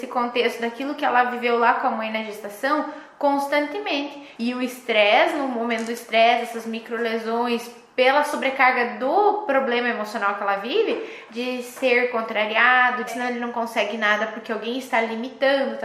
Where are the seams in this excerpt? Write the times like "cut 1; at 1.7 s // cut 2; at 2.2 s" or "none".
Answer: cut 1; at 4.4 s // cut 2; at 11.3 s // cut 3; at 13.1 s